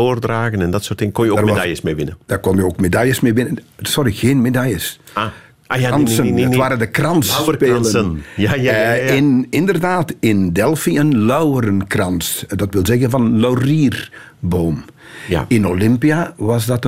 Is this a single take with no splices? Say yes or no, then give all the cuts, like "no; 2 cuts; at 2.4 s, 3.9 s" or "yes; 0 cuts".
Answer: yes; 0 cuts